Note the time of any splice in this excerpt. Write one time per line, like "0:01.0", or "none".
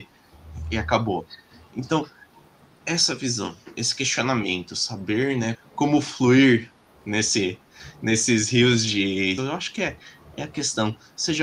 0:05.5
0:09.4